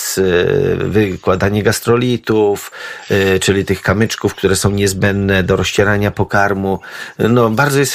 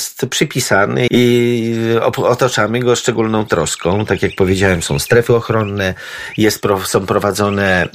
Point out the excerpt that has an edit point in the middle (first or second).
second